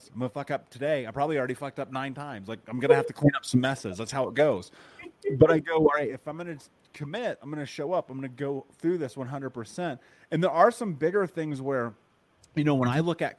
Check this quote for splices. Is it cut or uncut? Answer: uncut